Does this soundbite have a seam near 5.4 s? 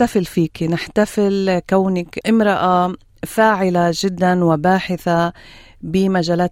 no; 1 cut; at 2.2 s

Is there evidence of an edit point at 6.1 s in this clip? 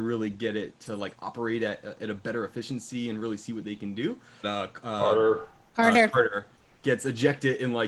no; 1 cut; at 4.4 s

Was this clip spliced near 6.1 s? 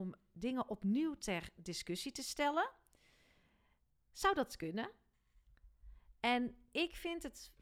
no; 0 cuts

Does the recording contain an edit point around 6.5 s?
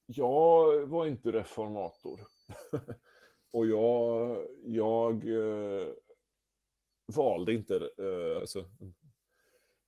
no; 2 cuts; at 3.5 s, 8.4 s

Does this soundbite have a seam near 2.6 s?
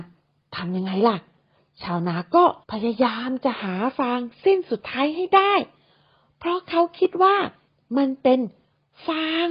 yes; 1 cut; at 2.6 s

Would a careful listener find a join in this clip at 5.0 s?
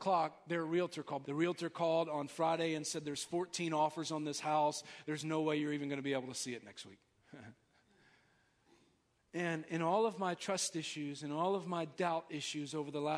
no; 2 cuts; at 1.2 s, 9.2 s

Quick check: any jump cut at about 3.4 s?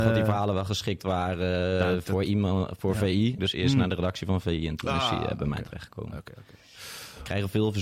yes; 1 cut; at 3.4 s

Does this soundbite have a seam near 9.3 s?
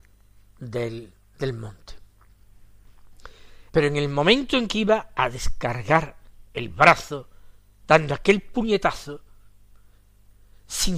no; 1 cut; at 3.7 s

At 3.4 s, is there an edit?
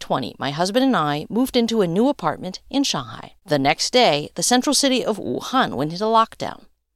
yes; 1 cut; at 3.4 s

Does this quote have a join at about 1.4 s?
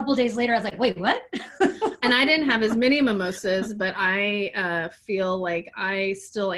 no; 0 cuts

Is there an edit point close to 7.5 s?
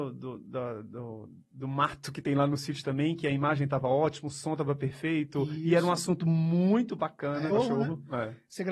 yes; 1 cut; at 7.5 s

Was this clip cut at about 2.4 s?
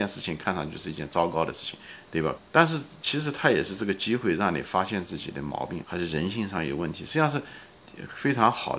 yes; 2 cuts; at 2.4 s, 5.8 s

